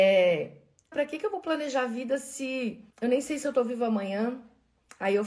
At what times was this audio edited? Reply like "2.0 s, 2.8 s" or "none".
0.9 s, 2.9 s